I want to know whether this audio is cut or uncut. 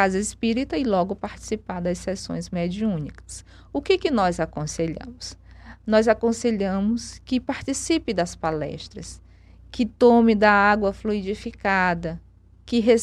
uncut